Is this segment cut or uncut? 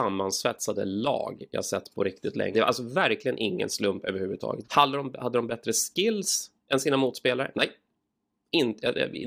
cut